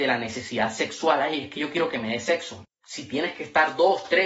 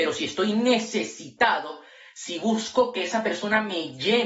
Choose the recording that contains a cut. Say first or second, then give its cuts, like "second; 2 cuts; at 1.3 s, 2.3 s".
first; 1 cut; at 2.6 s